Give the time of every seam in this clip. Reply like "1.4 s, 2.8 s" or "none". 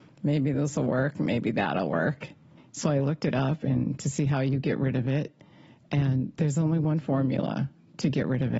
2.6 s